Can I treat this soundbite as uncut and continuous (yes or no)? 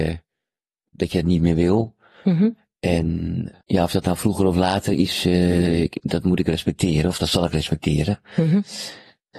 no